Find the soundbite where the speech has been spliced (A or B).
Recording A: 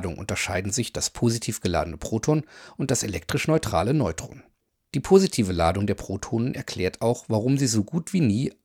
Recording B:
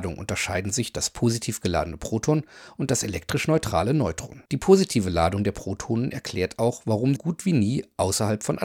B